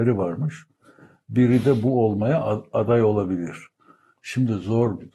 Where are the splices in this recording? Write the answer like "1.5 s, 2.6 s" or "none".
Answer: none

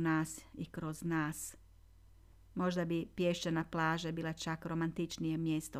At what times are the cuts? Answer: 2.3 s

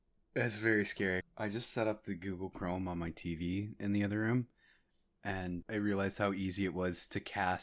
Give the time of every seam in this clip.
1.2 s, 5.6 s

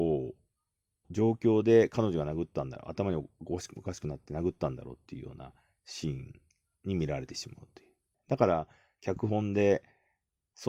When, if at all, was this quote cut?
1.0 s, 8.1 s

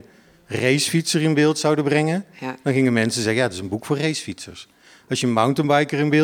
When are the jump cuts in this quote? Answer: none

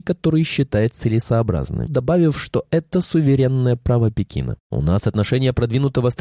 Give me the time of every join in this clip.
1.9 s, 4.6 s

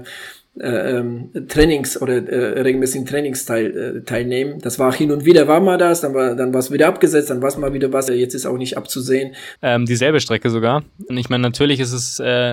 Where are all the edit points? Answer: 8.1 s, 9.6 s, 11.1 s

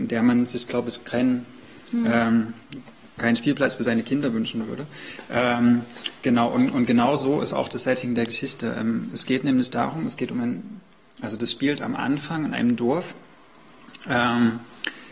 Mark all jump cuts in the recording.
none

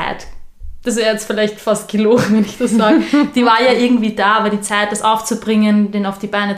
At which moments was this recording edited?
none

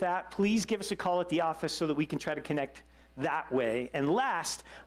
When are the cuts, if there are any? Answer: none

